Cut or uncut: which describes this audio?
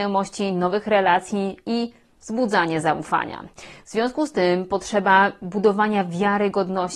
uncut